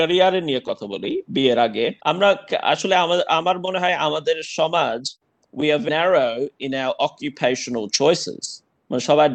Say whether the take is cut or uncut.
cut